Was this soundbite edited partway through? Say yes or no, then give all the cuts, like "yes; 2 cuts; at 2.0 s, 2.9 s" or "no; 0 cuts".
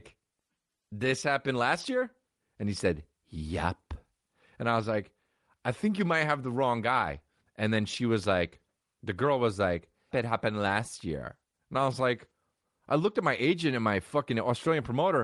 yes; 1 cut; at 10.1 s